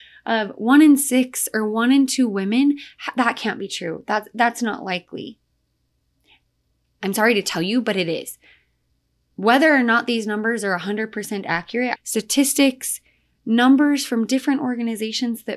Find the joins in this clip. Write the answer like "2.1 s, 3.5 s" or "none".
12.0 s

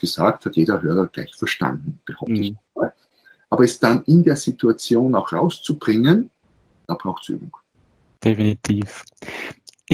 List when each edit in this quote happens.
none

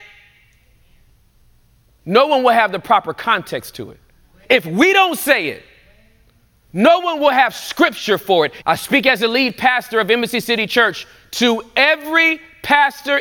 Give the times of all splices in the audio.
8.6 s

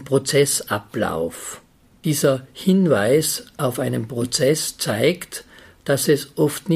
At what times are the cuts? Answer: none

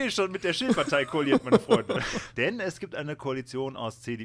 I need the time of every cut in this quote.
2.3 s

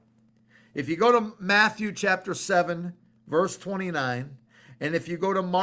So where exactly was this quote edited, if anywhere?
none

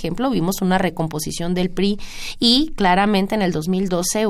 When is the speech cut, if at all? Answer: none

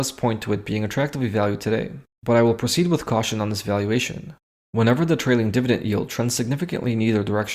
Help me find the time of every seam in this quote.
none

